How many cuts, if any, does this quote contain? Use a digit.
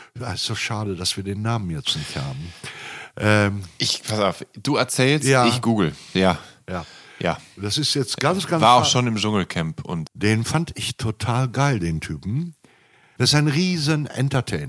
3